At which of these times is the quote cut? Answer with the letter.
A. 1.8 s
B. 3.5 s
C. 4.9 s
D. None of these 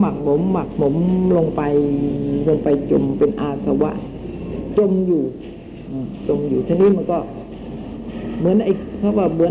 D